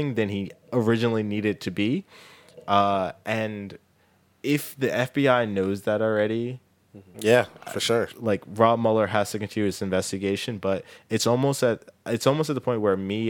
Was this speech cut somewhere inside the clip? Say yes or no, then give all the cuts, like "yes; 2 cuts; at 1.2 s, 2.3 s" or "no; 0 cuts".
yes; 1 cut; at 7.1 s